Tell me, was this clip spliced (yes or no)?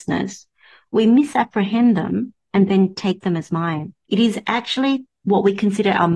yes